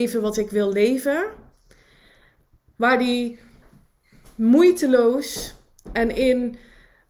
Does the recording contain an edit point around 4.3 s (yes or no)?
no